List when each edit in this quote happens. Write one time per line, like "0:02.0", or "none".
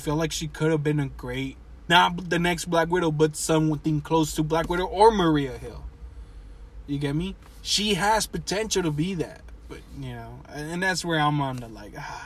0:01.9